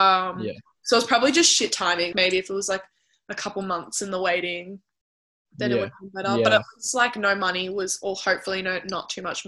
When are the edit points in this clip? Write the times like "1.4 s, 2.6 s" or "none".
2.1 s